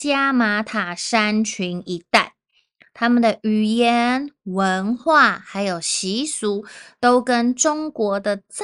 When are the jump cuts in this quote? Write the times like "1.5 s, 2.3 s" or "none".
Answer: none